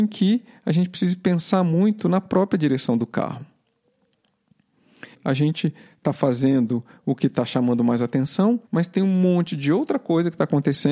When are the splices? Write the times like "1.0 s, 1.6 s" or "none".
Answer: 5.1 s, 8.7 s